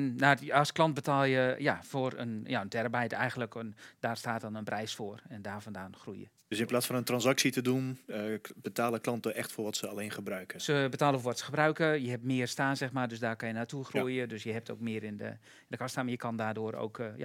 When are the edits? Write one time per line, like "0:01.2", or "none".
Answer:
none